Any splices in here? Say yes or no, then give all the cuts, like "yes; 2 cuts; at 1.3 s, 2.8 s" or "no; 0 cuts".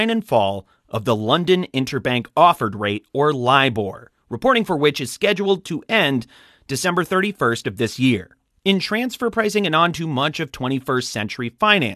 no; 0 cuts